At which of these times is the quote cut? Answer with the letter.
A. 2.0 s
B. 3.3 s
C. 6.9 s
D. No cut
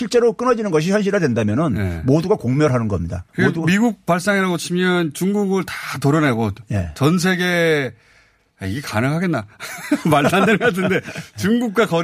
B